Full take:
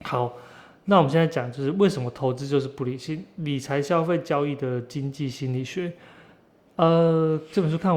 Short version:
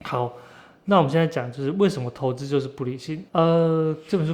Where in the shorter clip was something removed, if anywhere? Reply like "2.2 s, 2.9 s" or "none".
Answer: 3.3 s